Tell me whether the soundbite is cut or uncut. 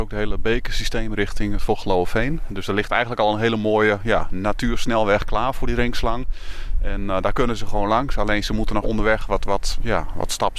cut